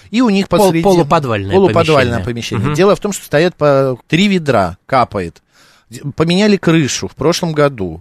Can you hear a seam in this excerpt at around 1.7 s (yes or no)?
no